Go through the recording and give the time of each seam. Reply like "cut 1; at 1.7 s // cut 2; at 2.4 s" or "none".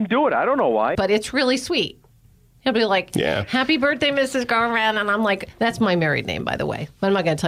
cut 1; at 0.9 s